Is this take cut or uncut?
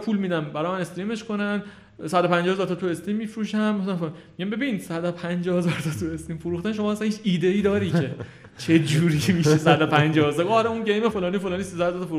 cut